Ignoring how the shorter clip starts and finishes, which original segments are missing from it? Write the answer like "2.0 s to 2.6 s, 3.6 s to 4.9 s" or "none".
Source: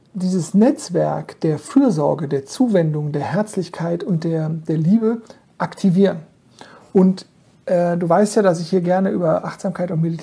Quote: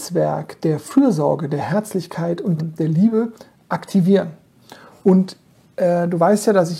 2.3 s to 3.1 s, 4.2 s to 4.5 s